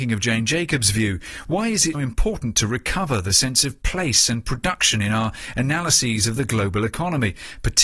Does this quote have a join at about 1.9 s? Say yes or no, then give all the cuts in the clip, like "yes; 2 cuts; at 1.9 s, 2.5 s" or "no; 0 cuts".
yes; 1 cut; at 1.9 s